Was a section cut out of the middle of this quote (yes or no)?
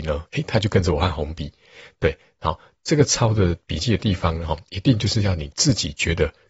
yes